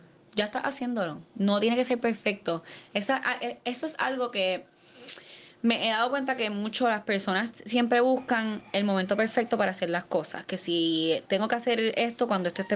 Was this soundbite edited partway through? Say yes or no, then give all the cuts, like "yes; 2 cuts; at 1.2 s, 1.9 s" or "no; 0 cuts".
no; 0 cuts